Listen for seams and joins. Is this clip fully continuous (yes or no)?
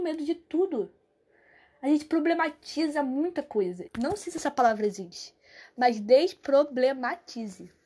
no